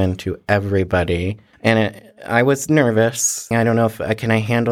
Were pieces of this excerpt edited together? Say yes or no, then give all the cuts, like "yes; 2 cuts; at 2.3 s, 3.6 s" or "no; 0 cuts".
yes; 2 cuts; at 1.5 s, 3.5 s